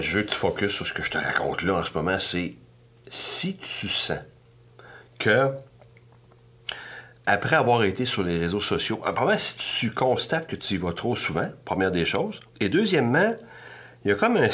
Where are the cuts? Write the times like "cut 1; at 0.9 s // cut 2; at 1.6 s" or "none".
cut 1; at 12.5 s